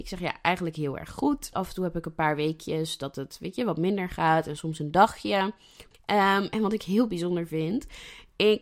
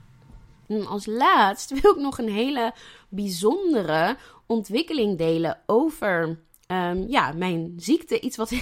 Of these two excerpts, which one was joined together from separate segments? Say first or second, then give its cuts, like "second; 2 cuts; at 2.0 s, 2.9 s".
first; 2 cuts; at 1.5 s, 5.9 s